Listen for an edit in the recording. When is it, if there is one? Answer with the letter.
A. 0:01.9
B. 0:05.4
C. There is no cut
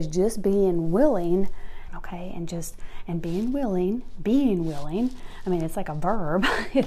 A